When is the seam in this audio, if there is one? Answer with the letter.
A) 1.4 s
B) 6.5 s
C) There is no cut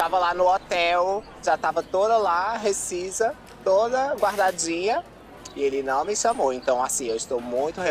A